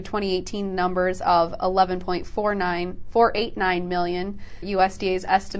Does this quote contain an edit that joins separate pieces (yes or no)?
yes